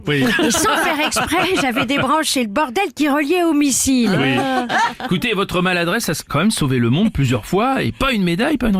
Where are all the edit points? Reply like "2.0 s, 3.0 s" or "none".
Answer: 4.7 s